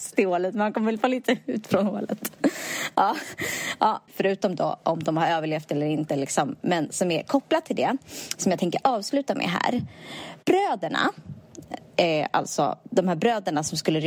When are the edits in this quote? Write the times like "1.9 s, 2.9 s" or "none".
4.1 s